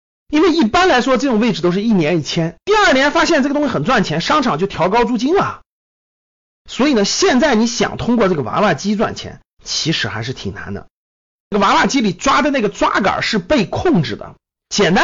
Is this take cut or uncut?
cut